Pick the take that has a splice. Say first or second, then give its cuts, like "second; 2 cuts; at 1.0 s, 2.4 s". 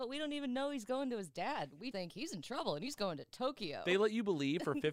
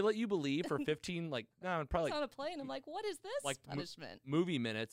first; 1 cut; at 1.9 s